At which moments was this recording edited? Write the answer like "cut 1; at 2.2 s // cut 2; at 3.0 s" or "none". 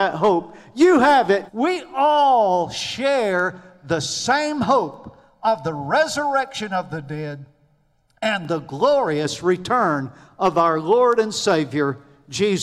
cut 1; at 1.5 s